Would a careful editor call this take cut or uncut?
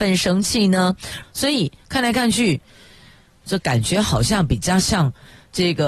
cut